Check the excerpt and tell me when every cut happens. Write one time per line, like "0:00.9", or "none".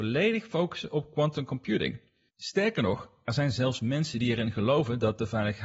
0:02.3